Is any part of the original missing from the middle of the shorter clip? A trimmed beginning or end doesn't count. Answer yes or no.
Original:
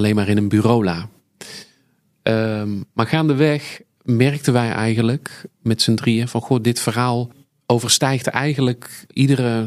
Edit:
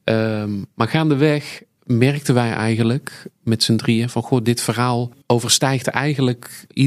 yes